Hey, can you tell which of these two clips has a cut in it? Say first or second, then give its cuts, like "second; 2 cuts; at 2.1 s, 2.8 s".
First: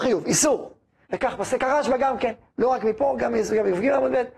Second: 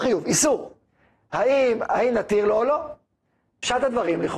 first; 1 cut; at 1.0 s